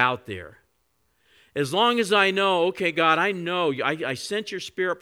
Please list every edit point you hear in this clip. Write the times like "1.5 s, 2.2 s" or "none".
none

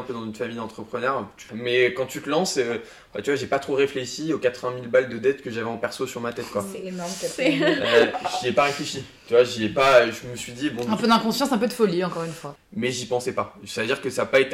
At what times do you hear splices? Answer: none

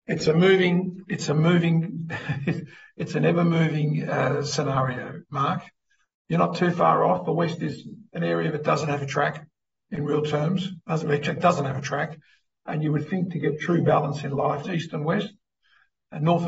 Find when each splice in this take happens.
14.6 s

